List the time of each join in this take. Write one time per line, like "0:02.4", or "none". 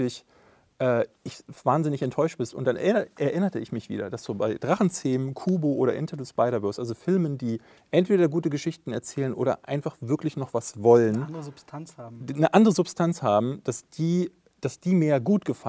none